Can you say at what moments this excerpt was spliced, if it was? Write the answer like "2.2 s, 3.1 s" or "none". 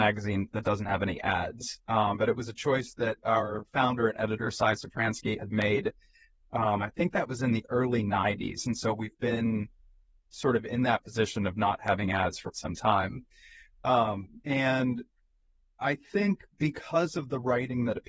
12.5 s, 14.4 s